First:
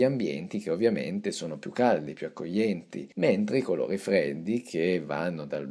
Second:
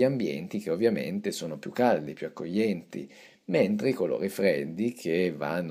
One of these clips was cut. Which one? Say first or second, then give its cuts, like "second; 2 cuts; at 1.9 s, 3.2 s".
first; 1 cut; at 3.1 s